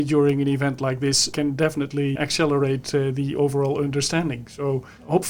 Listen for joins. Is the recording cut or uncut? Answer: uncut